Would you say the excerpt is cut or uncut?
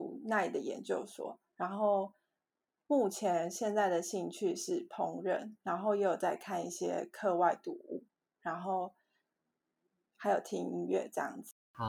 uncut